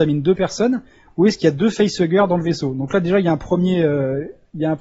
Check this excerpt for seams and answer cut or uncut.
uncut